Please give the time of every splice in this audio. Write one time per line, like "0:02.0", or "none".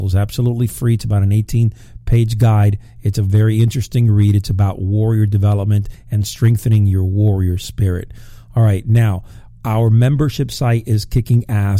none